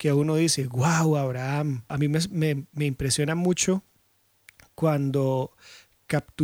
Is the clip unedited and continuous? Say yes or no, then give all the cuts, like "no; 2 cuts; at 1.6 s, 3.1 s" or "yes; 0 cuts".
yes; 0 cuts